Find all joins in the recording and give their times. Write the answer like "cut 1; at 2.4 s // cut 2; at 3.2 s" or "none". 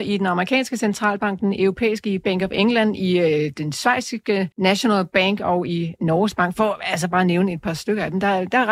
cut 1; at 4.5 s